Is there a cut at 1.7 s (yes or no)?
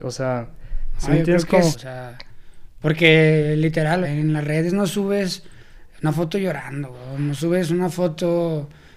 yes